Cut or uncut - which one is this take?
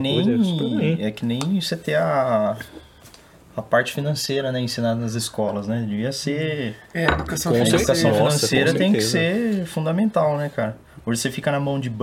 uncut